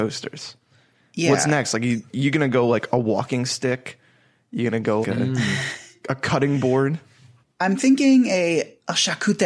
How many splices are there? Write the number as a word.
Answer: two